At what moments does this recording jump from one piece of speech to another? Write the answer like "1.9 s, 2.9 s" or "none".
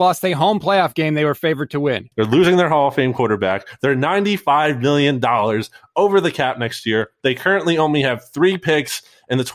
2.1 s